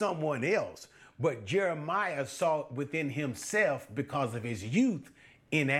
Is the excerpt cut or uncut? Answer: uncut